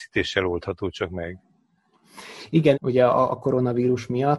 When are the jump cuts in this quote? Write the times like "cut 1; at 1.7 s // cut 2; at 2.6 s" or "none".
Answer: cut 1; at 2.7 s

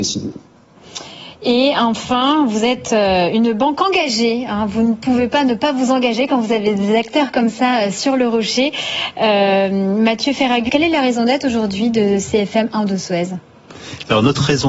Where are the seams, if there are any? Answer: cut 1; at 10.7 s

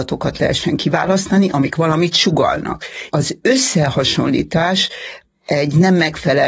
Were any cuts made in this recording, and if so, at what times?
cut 1; at 3.1 s

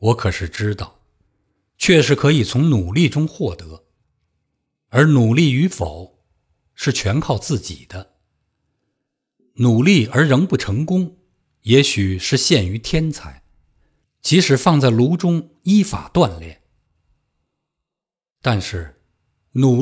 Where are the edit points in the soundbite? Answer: cut 1; at 14.0 s

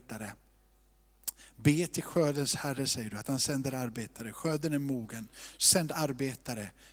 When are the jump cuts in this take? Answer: none

